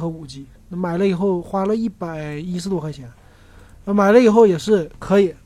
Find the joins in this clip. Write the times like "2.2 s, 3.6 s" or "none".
none

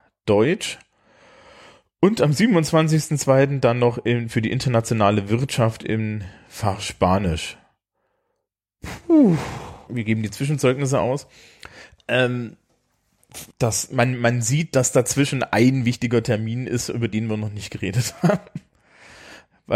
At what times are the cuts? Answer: 9.9 s, 12.0 s, 13.5 s

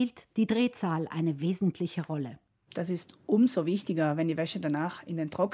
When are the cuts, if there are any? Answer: 2.7 s

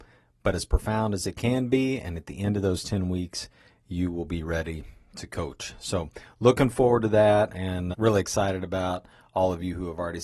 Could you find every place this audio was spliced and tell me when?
7.9 s

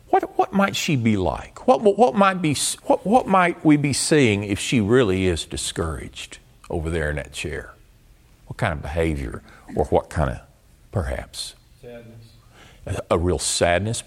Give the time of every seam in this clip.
2.8 s, 10.9 s

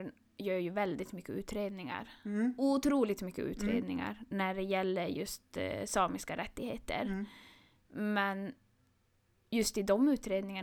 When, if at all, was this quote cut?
none

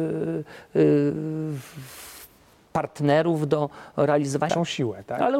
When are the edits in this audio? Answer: 4.5 s

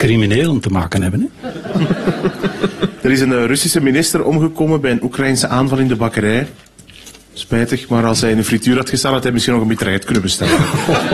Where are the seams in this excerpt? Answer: none

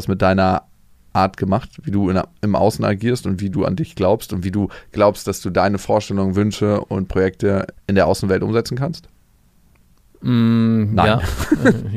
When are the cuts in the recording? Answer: none

